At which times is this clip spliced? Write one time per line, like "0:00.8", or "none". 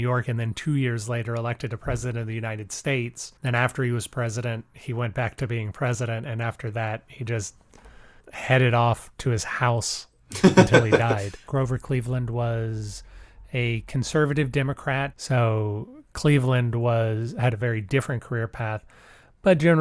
0:11.5
0:15.1

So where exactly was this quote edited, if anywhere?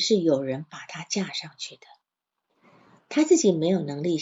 none

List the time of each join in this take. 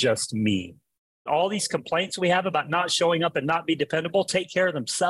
0:01.3

